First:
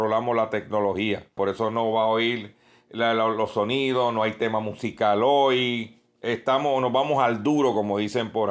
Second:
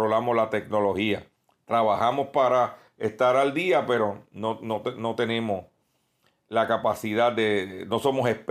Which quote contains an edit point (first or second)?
first